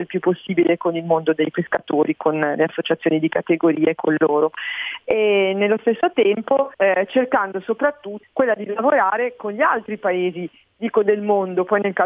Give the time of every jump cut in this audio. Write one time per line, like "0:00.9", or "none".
0:06.7
0:08.2

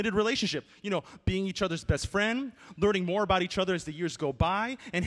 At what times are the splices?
none

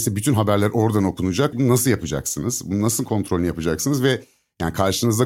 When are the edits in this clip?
0:01.5

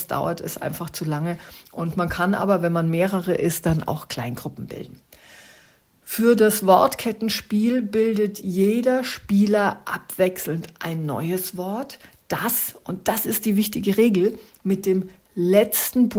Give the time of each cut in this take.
none

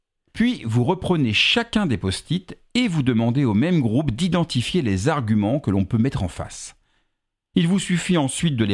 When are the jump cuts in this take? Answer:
none

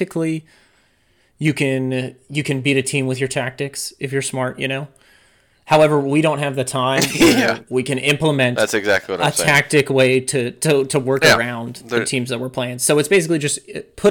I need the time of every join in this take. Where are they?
none

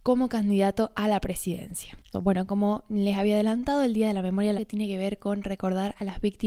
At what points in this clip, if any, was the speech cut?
0:02.1
0:04.6

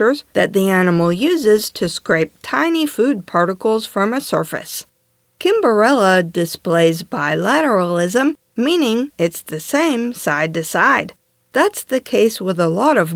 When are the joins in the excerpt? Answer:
none

